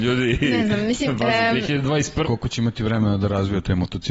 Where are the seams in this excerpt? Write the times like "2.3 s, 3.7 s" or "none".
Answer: 2.2 s